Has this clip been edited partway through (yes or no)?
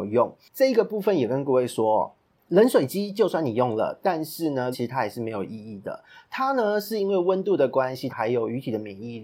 yes